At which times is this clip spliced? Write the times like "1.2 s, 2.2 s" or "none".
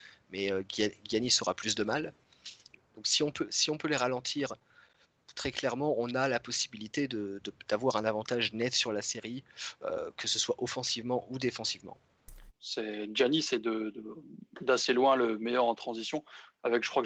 12.5 s